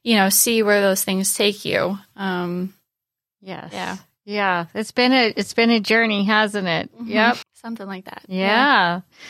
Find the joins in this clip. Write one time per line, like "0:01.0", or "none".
0:07.4

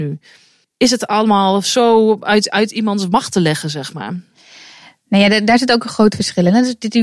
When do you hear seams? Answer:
none

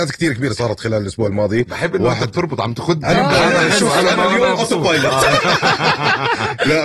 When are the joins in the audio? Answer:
0:03.0

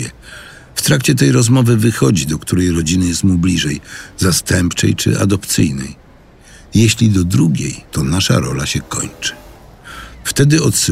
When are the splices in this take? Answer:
0:07.9

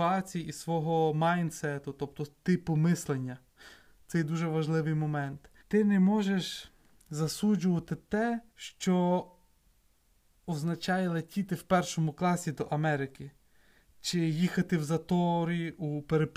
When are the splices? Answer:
0:05.6
0:08.5

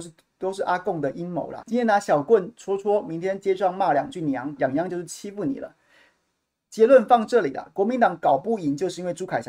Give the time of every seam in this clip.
0:01.6
0:04.6

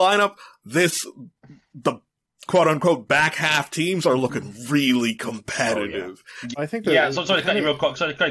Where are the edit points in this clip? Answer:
0:06.5

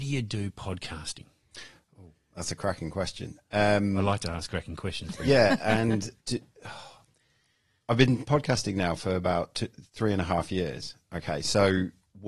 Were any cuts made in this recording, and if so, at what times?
0:06.2

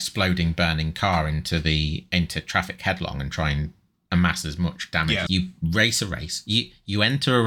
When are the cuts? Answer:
0:05.3

